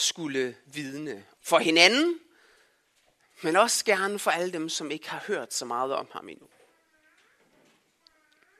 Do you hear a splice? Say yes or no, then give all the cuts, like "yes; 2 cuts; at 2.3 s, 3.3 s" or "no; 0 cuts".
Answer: yes; 1 cut; at 1.4 s